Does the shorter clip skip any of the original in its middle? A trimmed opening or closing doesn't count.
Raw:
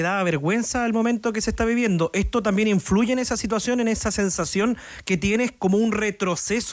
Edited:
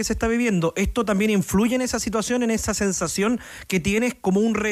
no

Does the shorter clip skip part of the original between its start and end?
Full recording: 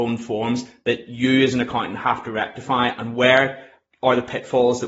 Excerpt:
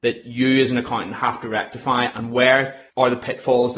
yes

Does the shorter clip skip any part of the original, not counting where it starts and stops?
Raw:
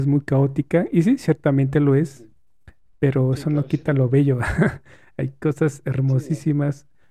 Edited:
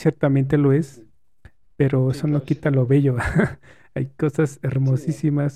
no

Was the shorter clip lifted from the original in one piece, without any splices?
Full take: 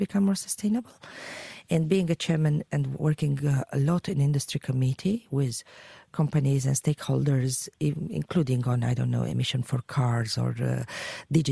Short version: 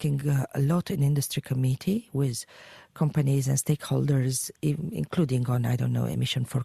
yes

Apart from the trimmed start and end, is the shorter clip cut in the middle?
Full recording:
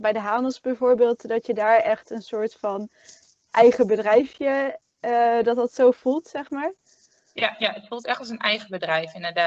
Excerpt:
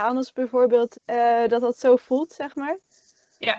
yes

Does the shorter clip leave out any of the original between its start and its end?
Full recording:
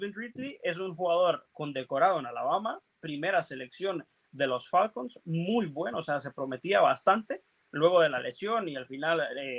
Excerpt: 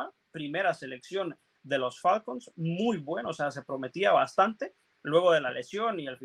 no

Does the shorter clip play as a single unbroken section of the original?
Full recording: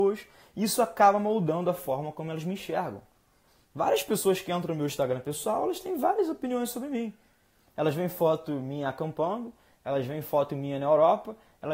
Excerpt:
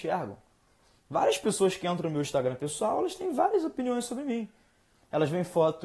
yes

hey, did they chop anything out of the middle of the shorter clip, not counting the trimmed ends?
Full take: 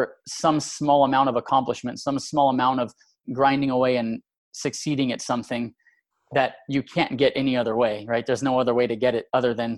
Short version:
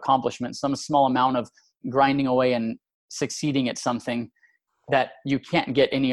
no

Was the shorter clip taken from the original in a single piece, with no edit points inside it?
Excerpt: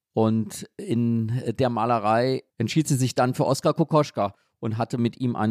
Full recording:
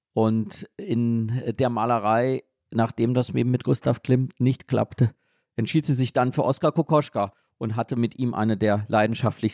no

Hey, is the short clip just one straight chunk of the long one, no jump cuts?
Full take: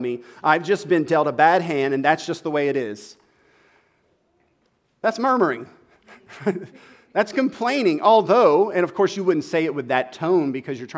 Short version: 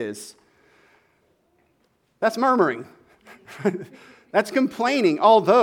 yes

